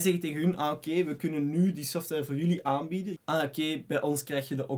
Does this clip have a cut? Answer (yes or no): yes